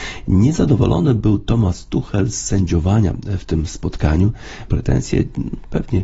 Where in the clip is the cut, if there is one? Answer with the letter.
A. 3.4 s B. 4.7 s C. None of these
B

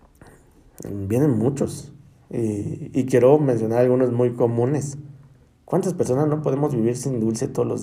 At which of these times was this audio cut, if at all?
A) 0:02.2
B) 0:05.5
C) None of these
B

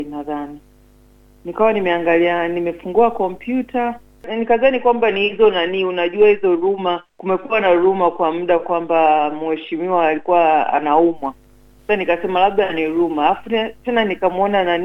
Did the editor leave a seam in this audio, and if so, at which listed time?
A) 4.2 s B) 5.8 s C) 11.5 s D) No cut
A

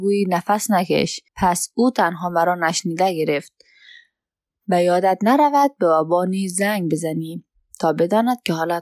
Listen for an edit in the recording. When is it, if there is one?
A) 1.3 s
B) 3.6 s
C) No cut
A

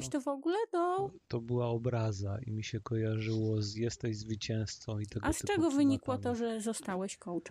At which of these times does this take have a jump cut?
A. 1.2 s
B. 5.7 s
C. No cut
C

